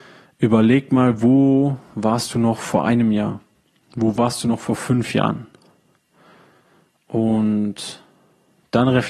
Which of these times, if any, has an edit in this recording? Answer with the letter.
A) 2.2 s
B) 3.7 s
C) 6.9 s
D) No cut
D